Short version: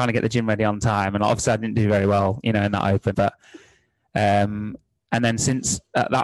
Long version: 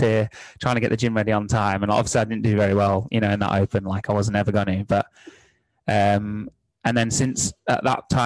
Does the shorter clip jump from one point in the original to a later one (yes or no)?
yes